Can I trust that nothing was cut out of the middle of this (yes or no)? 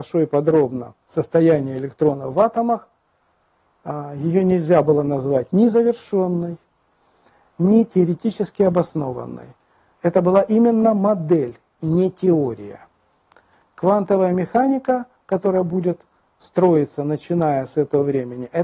no